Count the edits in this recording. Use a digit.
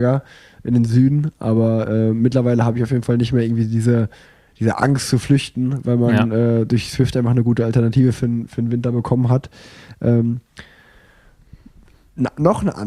0